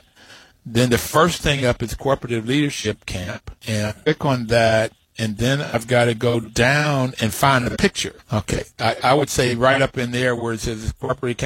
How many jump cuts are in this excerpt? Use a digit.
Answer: 2